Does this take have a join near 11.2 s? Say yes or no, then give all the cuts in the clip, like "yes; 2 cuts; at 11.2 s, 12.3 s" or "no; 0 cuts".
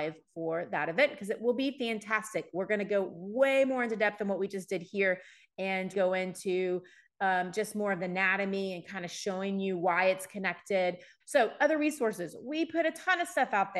yes; 2 cuts; at 5.9 s, 11.2 s